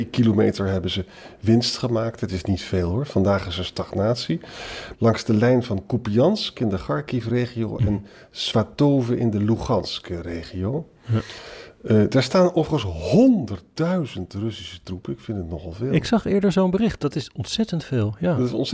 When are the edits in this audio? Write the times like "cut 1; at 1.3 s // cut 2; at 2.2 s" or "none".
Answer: cut 1; at 4.9 s